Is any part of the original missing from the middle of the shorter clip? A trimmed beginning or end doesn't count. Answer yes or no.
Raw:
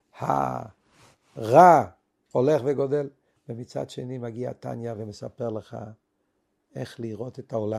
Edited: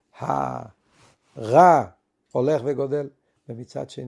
no